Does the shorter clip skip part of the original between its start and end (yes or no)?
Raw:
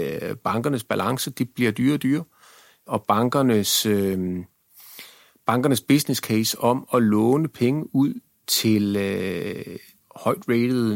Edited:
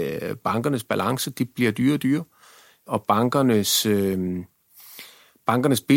no